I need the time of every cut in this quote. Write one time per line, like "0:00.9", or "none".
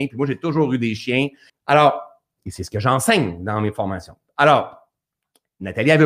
0:01.5